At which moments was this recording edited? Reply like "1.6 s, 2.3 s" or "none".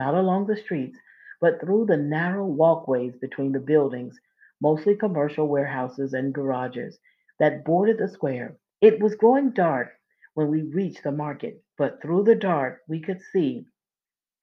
8.7 s